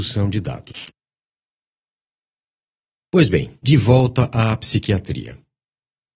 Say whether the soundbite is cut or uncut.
uncut